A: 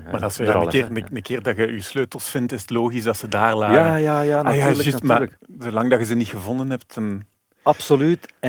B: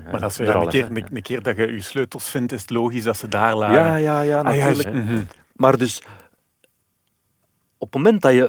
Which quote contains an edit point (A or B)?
B